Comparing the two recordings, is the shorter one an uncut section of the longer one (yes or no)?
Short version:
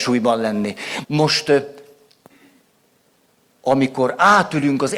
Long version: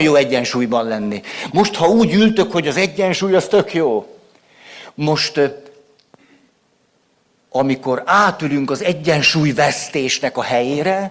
no